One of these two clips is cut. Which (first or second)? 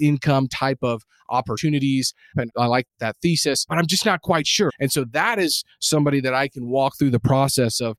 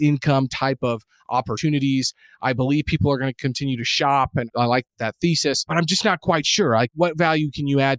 first